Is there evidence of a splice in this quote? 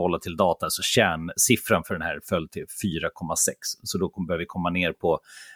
no; 0 cuts

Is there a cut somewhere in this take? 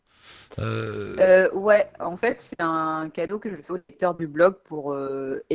no; 0 cuts

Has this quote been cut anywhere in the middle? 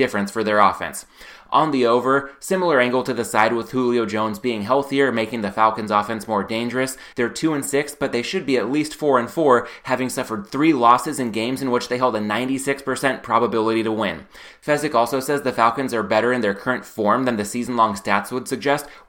yes; 1 cut; at 7.1 s

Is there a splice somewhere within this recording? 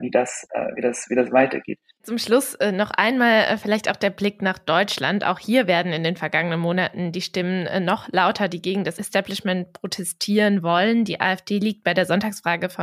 no; 0 cuts

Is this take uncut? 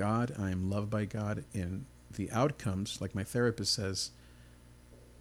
yes; 0 cuts

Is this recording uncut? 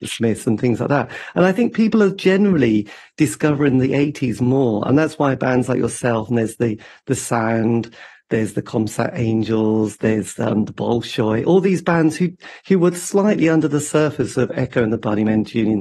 yes; 0 cuts

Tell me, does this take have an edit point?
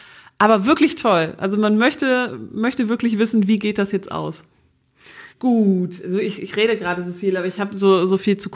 yes; 1 cut; at 5.3 s

